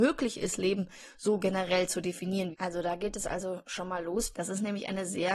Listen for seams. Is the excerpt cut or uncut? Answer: cut